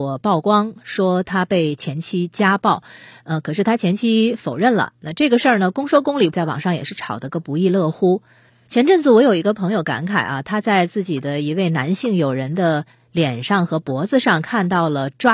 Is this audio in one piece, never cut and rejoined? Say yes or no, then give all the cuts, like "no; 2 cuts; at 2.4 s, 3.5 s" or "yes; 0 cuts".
no; 2 cuts; at 6.3 s, 8.6 s